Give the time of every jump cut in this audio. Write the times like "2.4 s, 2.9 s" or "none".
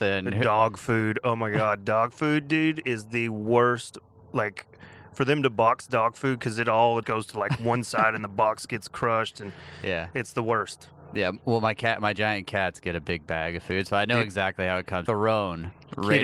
7.0 s, 15.1 s